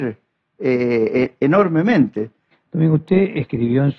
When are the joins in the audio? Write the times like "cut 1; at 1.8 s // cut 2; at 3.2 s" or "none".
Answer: cut 1; at 2.5 s